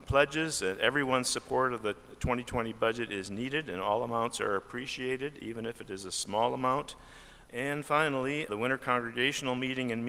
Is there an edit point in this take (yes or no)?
yes